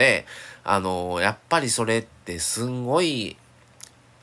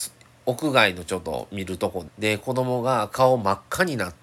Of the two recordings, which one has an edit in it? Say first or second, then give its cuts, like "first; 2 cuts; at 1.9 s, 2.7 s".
second; 1 cut; at 2.1 s